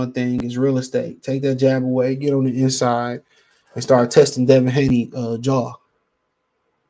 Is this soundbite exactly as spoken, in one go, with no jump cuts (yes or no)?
yes